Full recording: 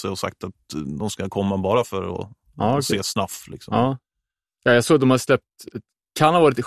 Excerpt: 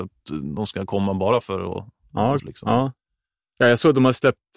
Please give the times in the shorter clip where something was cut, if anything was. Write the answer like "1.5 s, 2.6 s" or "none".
2.4 s